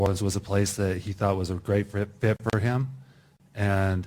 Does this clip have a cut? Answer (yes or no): no